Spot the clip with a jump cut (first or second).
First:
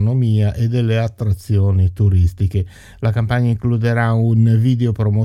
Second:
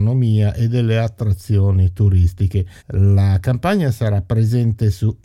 second